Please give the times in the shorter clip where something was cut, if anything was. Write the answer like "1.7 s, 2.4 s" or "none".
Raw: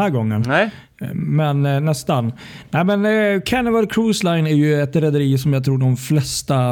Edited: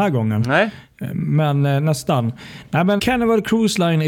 3.0 s

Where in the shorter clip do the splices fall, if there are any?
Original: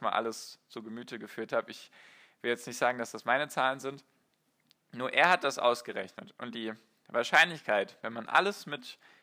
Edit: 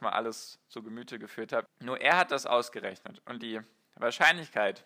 1.7 s

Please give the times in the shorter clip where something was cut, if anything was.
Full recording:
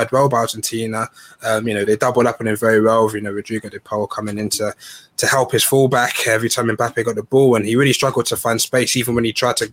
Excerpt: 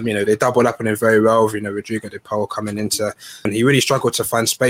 3.5 s

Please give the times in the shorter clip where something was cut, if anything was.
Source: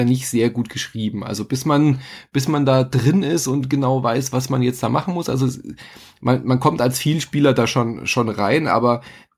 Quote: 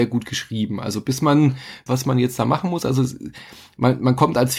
1.9 s

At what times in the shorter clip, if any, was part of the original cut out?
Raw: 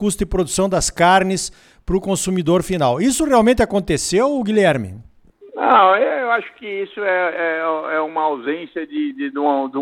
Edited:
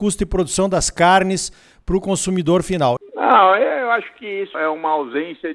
3.0 s, 4.5 s

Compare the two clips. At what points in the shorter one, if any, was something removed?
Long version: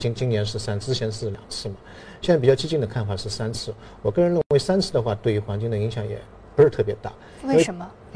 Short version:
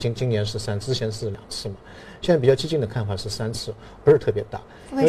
4.0 s

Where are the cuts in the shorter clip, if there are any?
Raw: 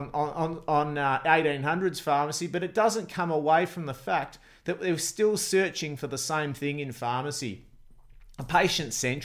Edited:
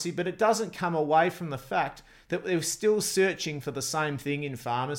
none

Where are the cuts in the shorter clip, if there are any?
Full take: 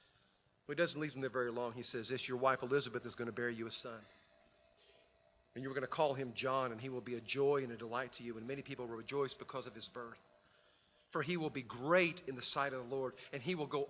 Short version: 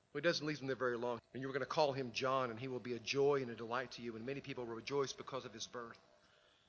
1.2 s

